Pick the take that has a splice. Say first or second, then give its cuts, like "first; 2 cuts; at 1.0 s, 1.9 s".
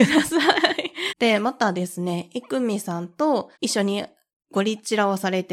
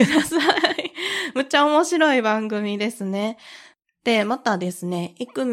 first; 2 cuts; at 1.1 s, 3.5 s